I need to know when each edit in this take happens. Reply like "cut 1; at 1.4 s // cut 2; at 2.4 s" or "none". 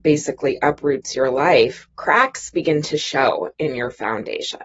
none